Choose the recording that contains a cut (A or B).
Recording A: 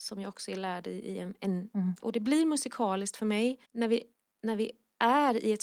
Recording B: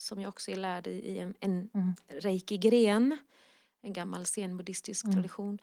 A